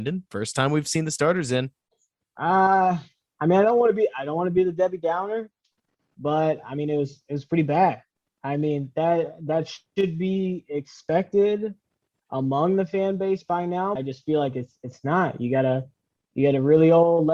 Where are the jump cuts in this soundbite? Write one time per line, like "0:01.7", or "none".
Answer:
0:14.0